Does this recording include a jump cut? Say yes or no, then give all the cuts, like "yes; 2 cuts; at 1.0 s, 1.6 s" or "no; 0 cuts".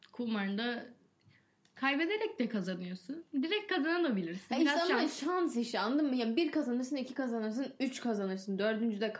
no; 0 cuts